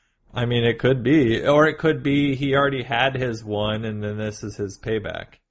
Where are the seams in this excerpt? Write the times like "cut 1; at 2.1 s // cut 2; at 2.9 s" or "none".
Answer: none